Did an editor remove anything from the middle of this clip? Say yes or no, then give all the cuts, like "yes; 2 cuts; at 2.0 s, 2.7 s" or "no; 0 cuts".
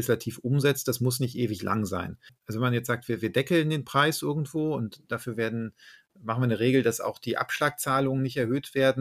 no; 0 cuts